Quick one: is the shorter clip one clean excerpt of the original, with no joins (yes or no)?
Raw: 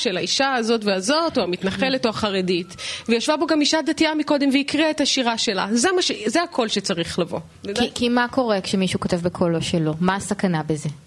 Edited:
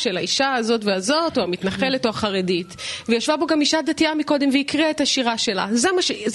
yes